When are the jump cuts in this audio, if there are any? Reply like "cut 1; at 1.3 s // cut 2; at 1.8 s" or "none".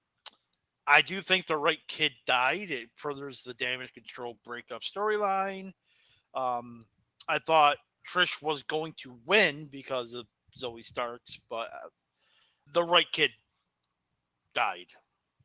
cut 1; at 12.7 s